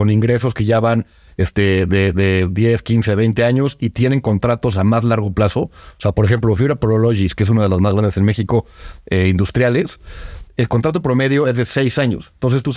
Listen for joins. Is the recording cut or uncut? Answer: uncut